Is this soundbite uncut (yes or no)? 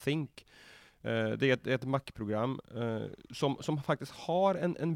yes